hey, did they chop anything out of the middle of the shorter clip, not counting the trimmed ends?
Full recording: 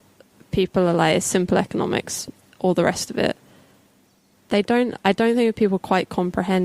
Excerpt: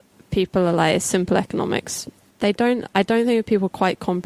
yes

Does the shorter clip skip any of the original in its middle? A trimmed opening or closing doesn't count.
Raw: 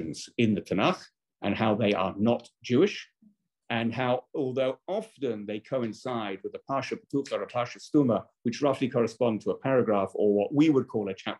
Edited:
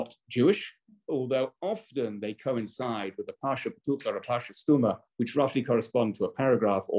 yes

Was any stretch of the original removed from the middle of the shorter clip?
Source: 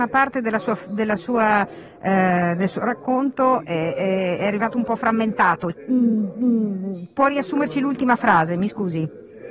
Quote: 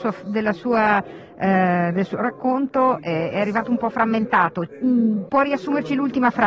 yes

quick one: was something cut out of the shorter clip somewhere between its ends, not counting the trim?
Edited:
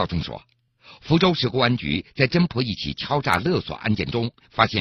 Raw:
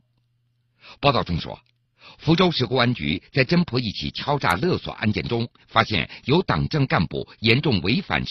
no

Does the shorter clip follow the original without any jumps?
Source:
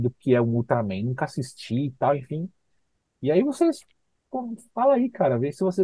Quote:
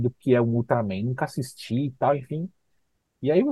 yes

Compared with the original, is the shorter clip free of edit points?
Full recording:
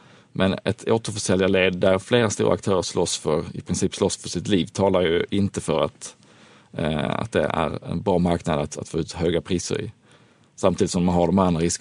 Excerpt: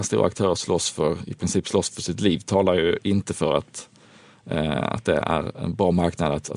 yes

